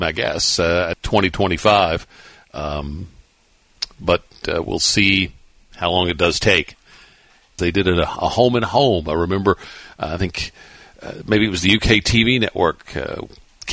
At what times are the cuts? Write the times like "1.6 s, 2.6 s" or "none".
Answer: 0.9 s, 7.6 s